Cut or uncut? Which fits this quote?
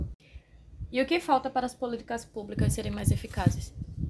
uncut